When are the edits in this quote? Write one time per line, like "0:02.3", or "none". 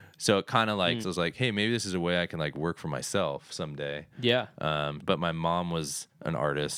0:01.0
0:05.0